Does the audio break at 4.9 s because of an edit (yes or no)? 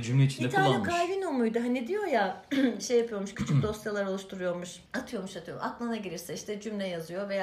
yes